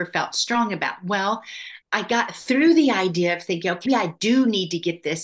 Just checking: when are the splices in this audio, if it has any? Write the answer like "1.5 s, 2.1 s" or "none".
1.8 s, 3.9 s

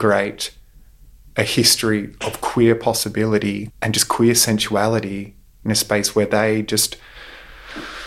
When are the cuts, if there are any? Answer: 3.7 s

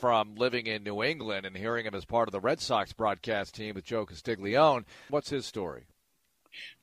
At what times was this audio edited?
5.1 s

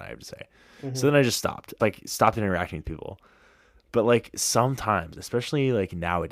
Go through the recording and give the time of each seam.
1.8 s

